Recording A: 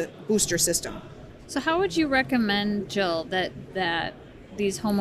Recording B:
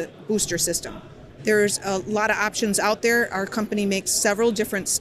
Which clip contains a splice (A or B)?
B